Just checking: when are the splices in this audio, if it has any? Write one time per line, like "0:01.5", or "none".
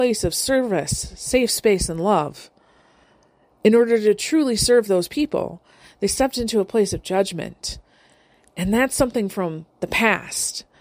0:09.7